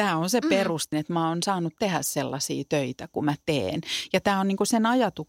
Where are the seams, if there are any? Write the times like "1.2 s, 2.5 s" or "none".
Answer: 0.9 s